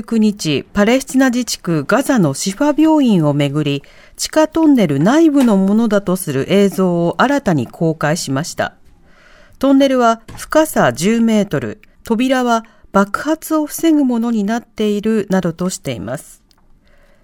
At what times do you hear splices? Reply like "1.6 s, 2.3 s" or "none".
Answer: 11.9 s